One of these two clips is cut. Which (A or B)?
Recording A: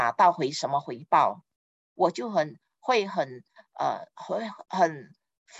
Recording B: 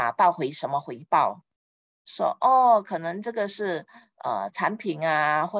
A